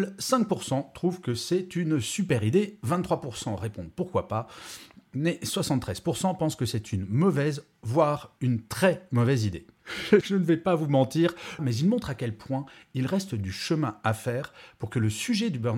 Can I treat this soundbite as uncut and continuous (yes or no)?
no